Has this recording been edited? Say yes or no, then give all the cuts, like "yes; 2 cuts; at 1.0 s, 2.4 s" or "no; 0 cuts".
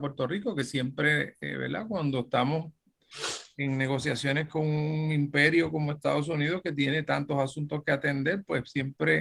no; 0 cuts